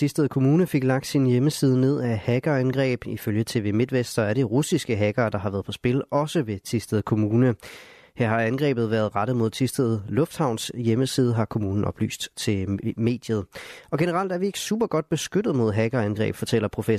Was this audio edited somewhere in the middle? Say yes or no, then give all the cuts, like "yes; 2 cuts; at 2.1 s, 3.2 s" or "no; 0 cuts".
no; 0 cuts